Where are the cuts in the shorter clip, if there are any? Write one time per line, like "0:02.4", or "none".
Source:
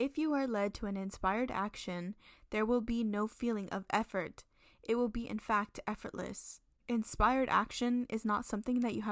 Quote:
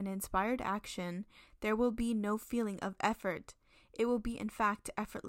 none